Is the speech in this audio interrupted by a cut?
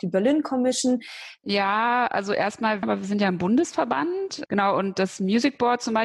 yes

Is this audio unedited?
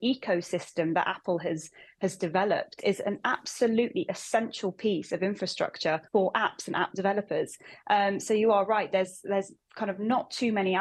no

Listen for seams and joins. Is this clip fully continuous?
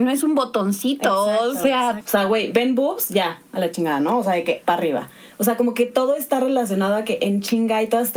no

